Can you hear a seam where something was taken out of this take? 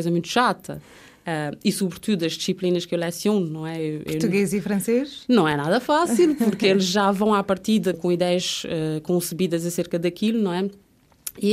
yes; 1 cut; at 7.9 s

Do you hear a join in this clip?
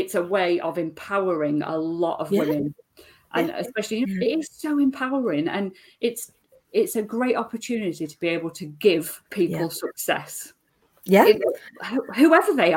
yes; 2 cuts; at 4.0 s, 9.3 s

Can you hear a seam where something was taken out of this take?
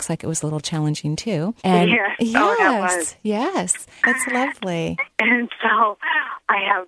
yes; 2 cuts; at 1.6 s, 4.0 s

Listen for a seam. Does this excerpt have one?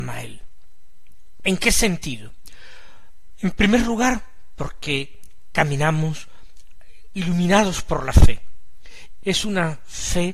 yes; 2 cuts; at 1.4 s, 9.2 s

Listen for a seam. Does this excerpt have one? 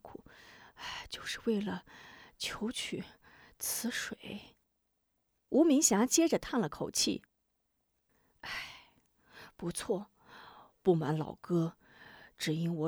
no; 0 cuts

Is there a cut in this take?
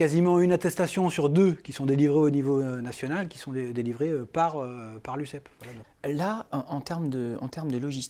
yes; 1 cut; at 5.8 s

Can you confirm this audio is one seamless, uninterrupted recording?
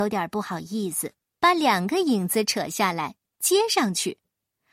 no; 1 cut; at 1.4 s

